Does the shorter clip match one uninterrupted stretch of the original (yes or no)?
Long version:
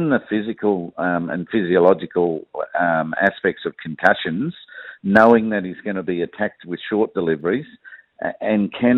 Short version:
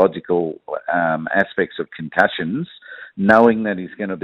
yes